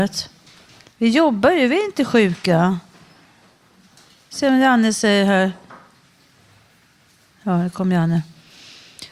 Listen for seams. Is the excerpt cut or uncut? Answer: uncut